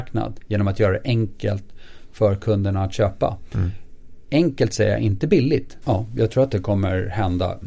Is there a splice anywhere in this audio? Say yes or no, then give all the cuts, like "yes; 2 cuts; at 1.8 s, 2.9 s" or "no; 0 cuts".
yes; 1 cut; at 5.8 s